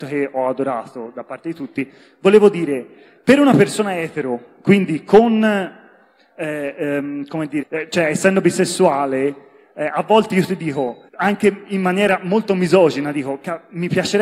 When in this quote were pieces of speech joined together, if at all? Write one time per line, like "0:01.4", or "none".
0:07.6
0:11.1